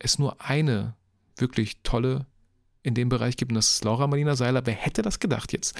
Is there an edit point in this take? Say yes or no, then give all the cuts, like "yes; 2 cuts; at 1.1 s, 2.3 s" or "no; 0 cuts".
no; 0 cuts